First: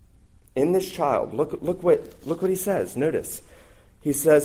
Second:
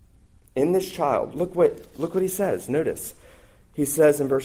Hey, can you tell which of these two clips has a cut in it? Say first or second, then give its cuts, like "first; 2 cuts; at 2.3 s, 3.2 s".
second; 1 cut; at 1.3 s